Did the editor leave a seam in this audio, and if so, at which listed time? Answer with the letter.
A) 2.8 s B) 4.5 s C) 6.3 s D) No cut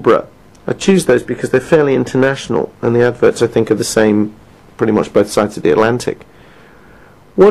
D